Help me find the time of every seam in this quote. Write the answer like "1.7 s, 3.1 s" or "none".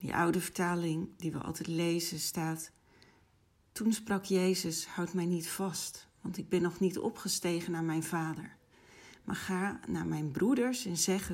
none